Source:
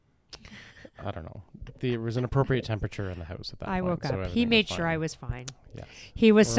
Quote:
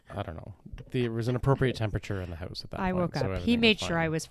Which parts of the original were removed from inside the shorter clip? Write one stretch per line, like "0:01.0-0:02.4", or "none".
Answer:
none